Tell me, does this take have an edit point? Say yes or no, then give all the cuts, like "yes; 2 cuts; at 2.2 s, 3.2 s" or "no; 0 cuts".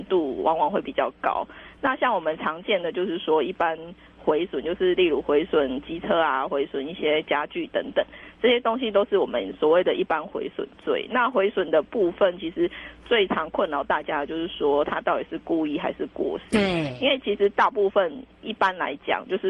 no; 0 cuts